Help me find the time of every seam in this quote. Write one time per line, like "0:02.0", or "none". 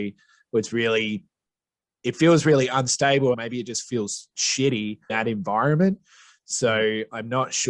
0:03.3
0:05.1